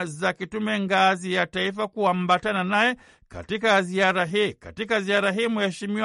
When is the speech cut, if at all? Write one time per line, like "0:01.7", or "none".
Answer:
none